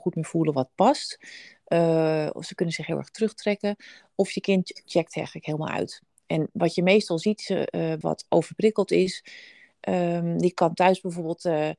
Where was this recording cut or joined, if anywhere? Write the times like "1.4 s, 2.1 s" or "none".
8.0 s